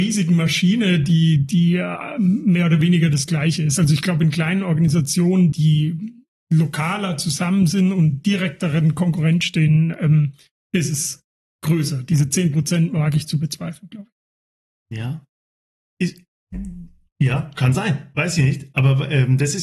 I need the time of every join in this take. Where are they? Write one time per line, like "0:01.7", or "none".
0:05.5